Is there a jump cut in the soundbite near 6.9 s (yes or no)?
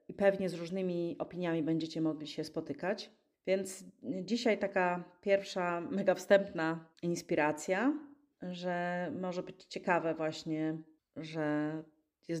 yes